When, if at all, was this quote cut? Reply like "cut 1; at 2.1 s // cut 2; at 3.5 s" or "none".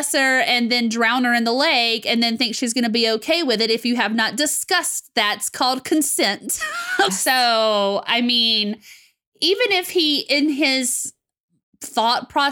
cut 1; at 7.1 s